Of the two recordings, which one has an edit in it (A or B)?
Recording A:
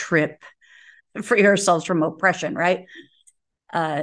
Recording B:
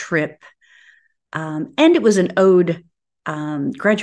A